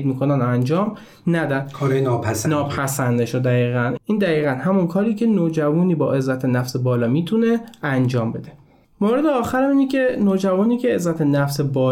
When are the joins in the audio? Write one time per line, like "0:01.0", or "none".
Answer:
none